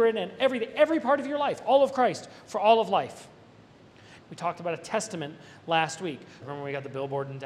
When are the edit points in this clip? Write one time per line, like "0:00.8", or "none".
0:04.2
0:06.4